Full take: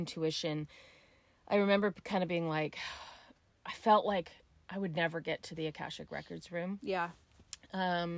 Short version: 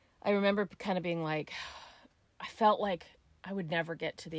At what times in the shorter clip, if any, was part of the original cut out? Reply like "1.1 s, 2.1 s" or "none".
none